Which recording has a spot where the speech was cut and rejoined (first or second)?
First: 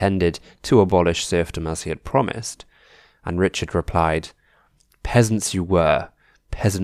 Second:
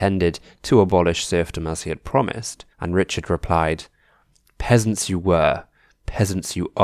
second